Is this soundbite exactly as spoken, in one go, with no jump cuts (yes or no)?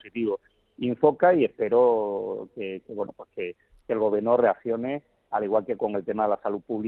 yes